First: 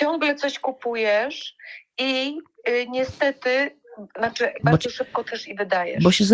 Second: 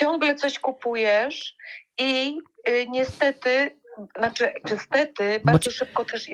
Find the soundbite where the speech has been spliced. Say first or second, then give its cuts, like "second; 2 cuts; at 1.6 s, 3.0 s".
first; 1 cut; at 4.6 s